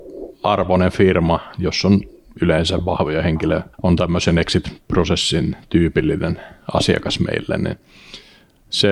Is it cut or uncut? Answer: cut